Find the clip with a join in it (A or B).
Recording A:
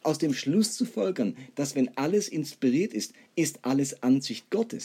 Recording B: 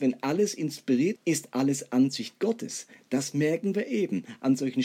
B